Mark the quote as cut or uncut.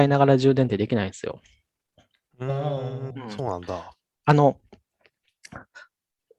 uncut